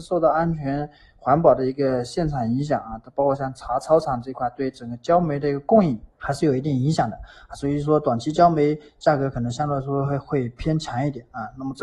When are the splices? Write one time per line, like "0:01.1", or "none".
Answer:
0:06.1